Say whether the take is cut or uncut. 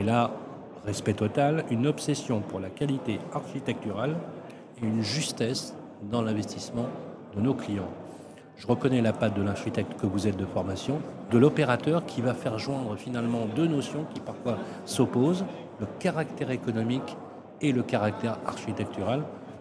cut